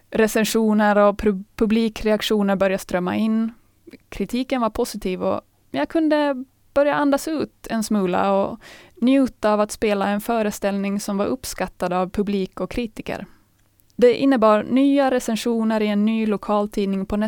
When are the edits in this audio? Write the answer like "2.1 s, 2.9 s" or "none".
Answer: 13.8 s